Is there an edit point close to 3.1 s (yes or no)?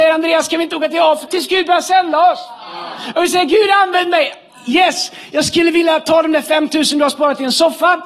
no